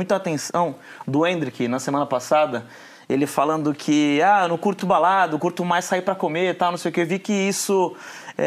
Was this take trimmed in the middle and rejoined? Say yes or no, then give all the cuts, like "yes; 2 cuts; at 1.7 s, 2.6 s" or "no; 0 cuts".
yes; 1 cut; at 4.8 s